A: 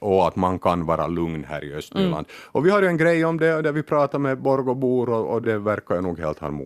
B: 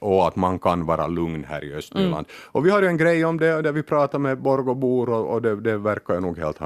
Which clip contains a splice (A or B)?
A